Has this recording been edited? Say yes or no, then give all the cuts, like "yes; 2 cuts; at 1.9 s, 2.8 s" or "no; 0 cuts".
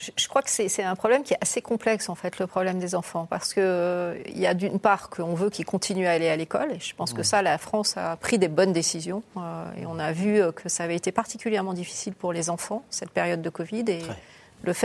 no; 0 cuts